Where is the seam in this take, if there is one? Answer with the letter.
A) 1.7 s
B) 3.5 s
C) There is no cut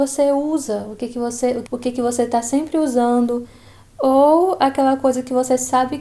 A